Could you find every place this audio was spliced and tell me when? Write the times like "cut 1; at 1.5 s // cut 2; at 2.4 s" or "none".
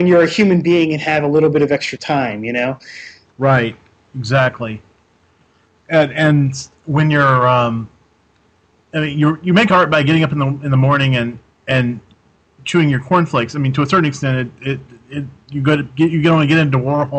none